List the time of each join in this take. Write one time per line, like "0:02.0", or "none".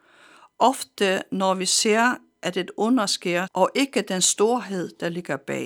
0:03.5